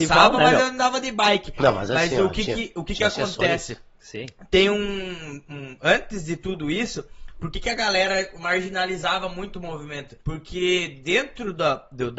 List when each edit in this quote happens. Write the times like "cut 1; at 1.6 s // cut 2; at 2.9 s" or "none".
cut 1; at 10.2 s